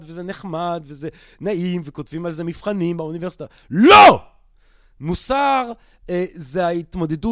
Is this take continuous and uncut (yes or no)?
yes